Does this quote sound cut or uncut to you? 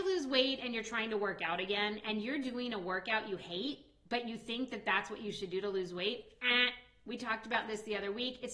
uncut